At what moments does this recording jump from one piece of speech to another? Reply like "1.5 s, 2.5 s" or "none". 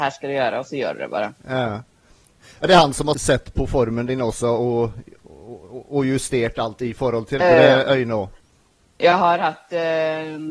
3.1 s, 7.4 s